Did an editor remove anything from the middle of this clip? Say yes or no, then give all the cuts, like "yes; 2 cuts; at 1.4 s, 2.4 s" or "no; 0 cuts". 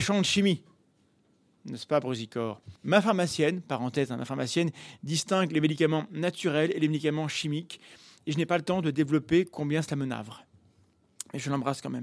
yes; 1 cut; at 2.8 s